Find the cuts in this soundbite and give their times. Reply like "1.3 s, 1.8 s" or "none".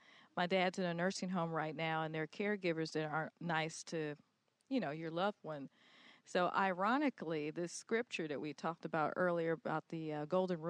3.3 s